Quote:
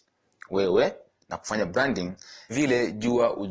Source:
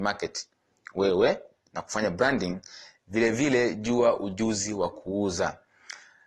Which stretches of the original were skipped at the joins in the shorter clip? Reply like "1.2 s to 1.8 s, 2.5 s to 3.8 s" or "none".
2.9 s to 3.3 s